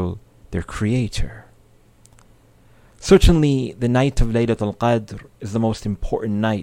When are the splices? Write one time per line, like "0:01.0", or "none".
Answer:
none

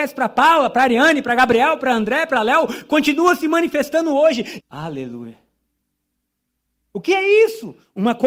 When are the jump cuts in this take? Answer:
0:04.6

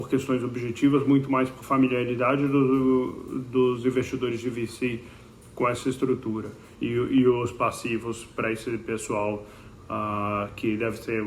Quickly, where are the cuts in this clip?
0:06.7

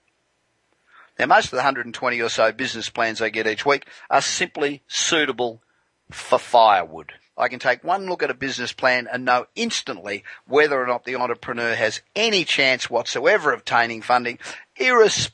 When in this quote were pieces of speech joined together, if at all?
0:07.2

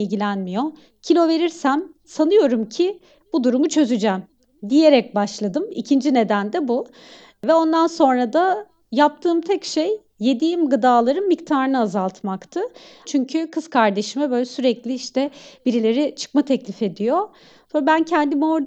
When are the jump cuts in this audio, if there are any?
0:13.0

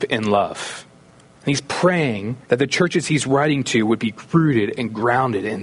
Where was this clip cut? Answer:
0:01.3
0:02.4

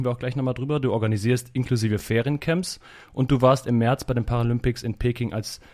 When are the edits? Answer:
none

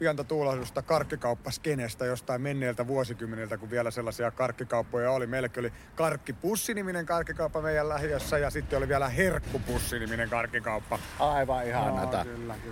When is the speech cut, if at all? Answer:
none

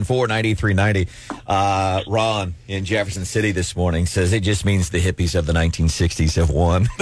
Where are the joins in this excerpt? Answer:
none

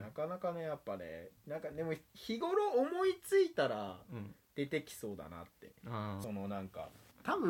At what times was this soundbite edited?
0:02.1
0:06.2

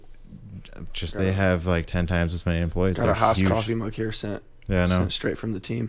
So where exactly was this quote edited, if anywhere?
none

